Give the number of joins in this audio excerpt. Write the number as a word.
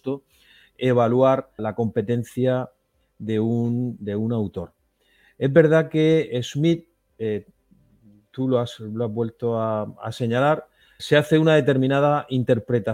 two